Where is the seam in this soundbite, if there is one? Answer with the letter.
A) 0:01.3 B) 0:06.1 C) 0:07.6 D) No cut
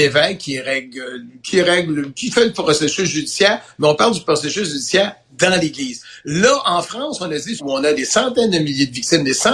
C